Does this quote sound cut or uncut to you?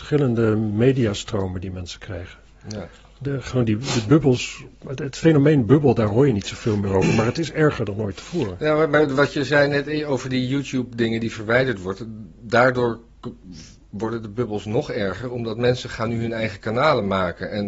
uncut